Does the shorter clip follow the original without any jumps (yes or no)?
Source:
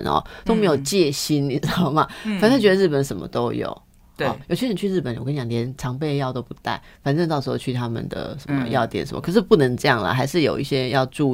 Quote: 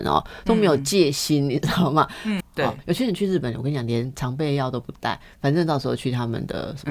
no